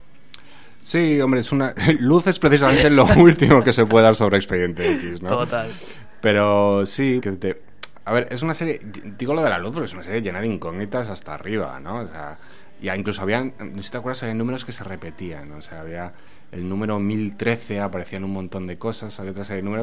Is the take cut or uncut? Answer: cut